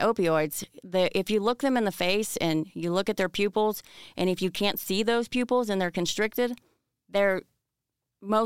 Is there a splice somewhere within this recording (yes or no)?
no